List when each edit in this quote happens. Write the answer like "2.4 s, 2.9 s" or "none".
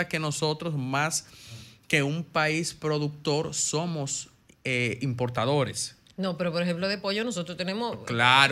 none

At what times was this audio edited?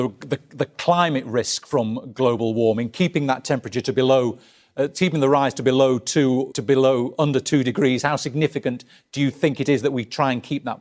6.5 s

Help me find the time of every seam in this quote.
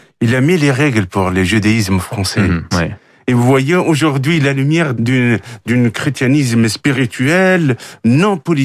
2.7 s, 5.0 s

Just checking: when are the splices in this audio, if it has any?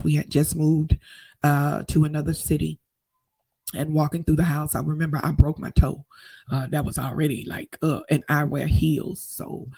none

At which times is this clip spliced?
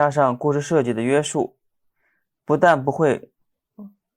none

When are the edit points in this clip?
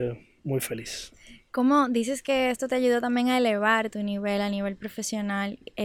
none

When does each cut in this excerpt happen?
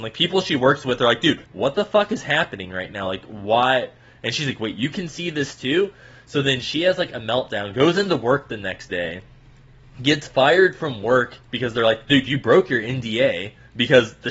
1.5 s

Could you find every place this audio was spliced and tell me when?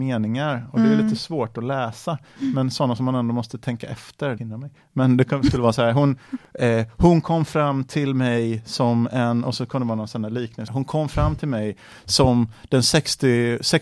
4.4 s, 10.7 s

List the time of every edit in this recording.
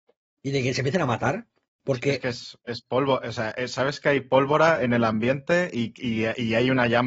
none

